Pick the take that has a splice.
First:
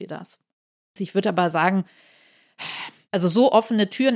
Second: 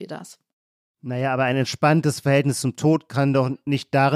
first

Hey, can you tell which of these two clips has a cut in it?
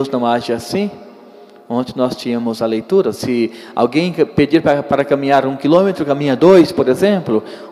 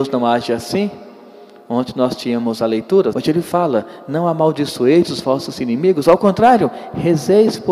second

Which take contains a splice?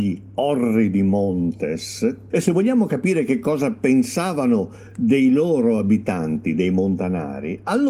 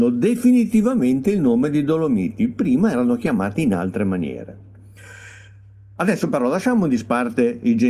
first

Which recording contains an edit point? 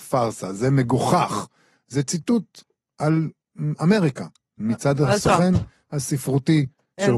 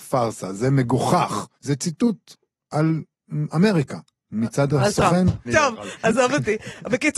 second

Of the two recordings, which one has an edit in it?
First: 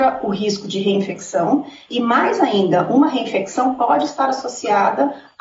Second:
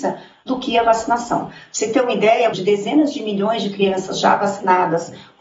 second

